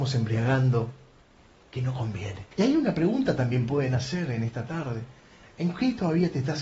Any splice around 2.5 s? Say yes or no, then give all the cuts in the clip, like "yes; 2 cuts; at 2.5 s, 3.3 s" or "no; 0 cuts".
yes; 1 cut; at 2.5 s